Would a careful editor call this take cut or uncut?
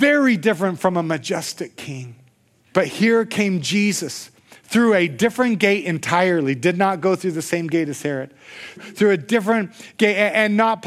cut